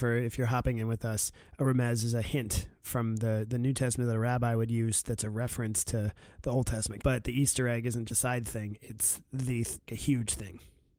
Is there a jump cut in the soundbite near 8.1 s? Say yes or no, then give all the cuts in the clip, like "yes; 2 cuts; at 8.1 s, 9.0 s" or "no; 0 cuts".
yes; 3 cuts; at 7.0 s, 8.1 s, 9.9 s